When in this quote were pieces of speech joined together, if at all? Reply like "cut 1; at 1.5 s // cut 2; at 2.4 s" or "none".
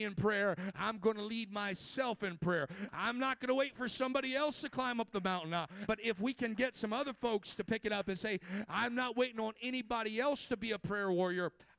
cut 1; at 5.9 s